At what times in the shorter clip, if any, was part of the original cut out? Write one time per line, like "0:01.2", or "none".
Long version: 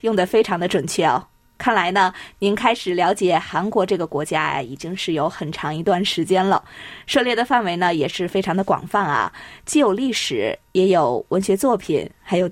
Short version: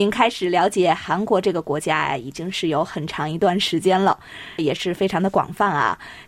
0:04.6